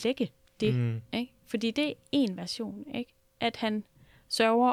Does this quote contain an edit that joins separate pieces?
no; 0 cuts

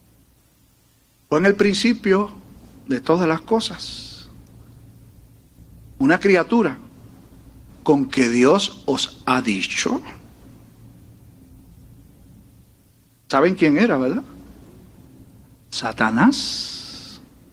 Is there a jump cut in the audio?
yes; 1 cut; at 7.7 s

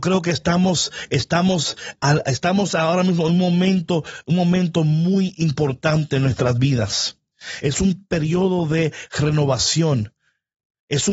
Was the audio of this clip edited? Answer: no; 0 cuts

